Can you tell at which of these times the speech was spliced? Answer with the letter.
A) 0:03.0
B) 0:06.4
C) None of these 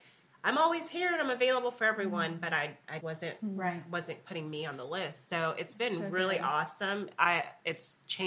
A